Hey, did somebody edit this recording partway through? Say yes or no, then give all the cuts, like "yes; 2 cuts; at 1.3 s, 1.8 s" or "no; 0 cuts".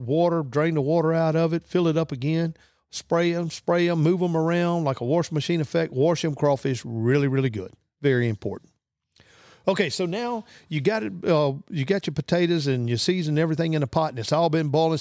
no; 0 cuts